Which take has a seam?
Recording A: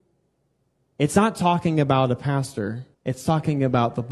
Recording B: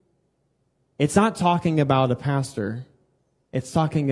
A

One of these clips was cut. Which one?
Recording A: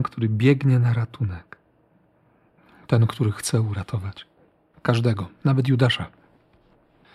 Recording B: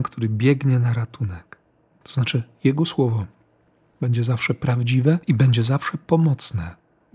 B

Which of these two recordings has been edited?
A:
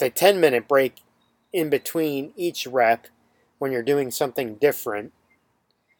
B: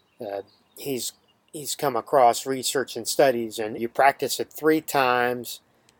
B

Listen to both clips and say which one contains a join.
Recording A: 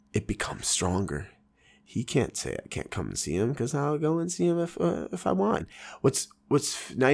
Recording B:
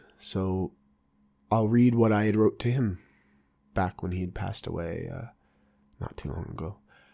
A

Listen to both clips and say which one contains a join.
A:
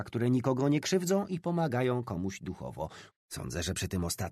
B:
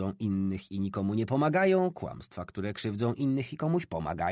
A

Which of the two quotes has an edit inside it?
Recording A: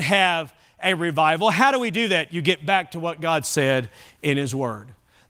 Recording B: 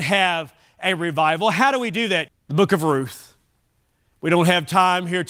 B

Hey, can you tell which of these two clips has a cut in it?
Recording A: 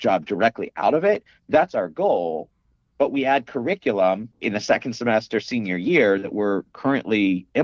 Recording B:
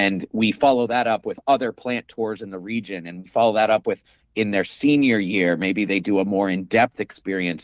A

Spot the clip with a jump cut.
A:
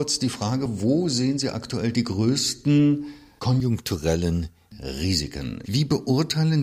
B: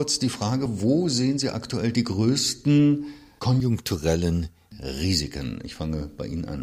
A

